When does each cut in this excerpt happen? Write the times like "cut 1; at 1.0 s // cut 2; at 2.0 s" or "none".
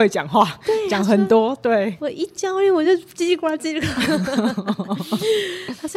none